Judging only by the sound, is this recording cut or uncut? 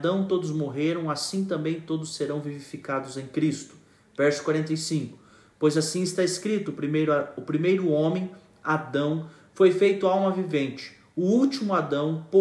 uncut